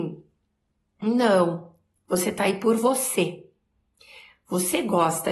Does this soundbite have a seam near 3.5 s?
no; 0 cuts

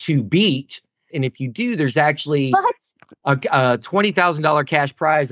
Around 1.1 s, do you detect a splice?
yes; 1 cut; at 1.1 s

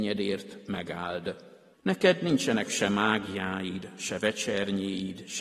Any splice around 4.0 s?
yes; 2 cuts; at 1.7 s, 4.0 s

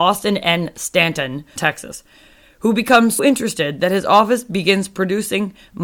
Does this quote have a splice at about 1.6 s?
yes; 2 cuts; at 1.6 s, 3.2 s

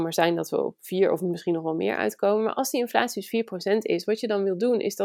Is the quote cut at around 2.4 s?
no; 0 cuts

